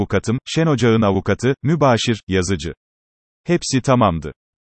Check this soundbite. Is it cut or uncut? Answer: uncut